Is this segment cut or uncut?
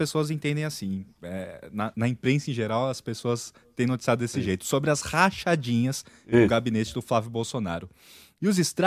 cut